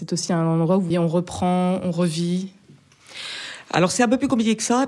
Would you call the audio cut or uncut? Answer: cut